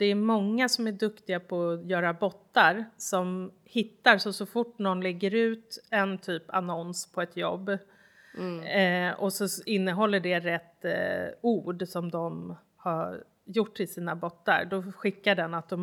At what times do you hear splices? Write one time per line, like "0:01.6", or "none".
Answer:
none